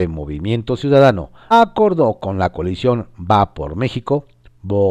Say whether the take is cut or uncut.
cut